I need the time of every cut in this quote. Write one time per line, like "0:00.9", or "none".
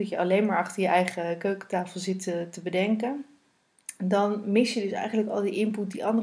none